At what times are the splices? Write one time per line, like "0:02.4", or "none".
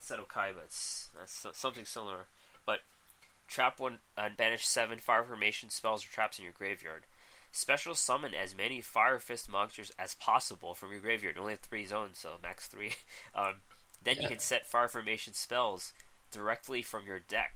0:04.4